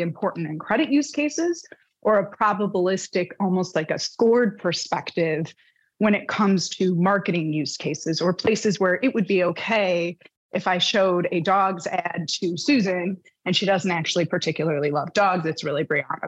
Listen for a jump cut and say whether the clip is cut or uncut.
uncut